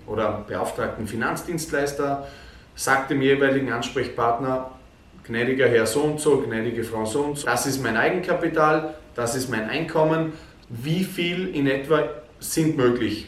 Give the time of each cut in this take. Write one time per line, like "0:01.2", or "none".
0:07.4
0:10.6